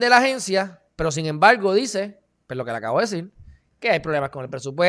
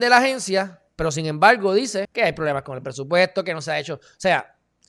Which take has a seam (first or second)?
second